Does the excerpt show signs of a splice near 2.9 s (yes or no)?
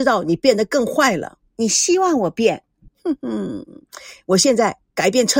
yes